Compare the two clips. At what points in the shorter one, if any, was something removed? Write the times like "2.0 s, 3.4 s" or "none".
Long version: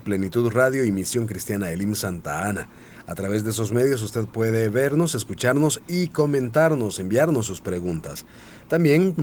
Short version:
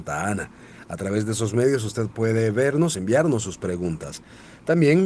2.9 s